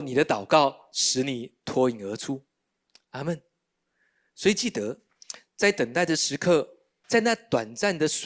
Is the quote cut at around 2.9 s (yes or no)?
no